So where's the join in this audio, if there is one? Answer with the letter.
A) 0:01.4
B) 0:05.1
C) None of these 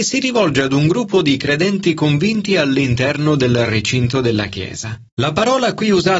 B